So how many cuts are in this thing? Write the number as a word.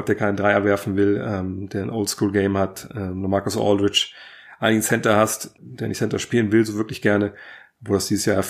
one